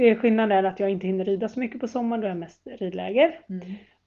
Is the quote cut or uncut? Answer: uncut